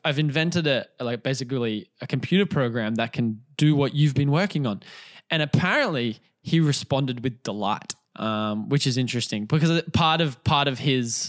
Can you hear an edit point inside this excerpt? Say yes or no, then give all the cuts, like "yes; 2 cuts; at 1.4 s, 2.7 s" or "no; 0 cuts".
yes; 1 cut; at 8.0 s